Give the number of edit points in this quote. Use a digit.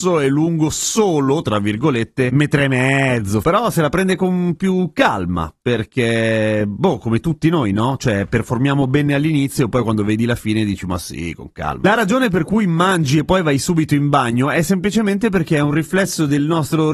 1